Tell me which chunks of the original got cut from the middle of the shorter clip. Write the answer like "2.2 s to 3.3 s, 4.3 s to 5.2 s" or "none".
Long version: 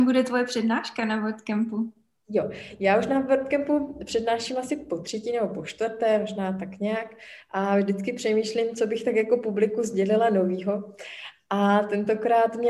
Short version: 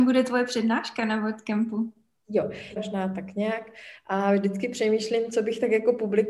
2.8 s to 6.2 s